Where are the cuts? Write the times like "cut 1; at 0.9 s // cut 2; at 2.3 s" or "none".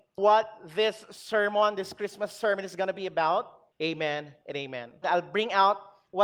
cut 1; at 3.7 s // cut 2; at 5.0 s